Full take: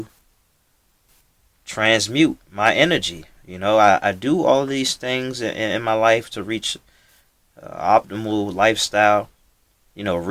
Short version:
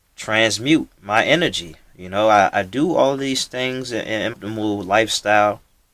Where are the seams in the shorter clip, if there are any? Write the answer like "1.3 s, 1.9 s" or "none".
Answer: 4.3 s